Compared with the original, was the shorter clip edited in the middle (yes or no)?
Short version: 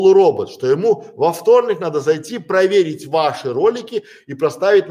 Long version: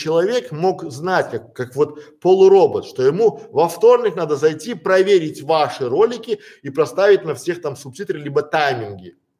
no